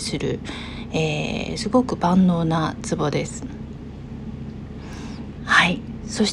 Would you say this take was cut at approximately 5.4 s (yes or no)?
yes